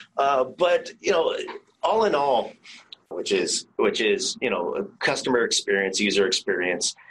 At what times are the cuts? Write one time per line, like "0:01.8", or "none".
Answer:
0:03.1